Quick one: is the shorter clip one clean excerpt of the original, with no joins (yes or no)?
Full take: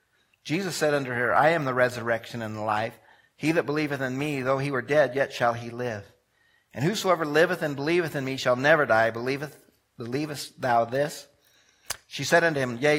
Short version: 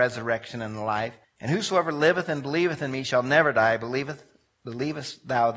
no